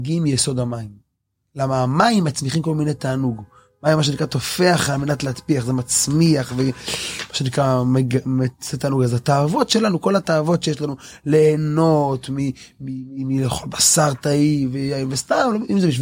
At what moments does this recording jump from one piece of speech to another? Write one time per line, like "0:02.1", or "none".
none